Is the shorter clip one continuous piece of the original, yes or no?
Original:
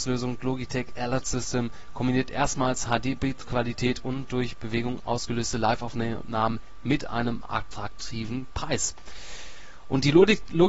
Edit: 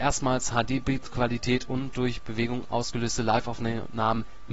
yes